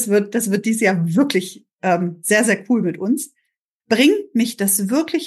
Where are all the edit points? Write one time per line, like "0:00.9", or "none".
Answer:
0:03.8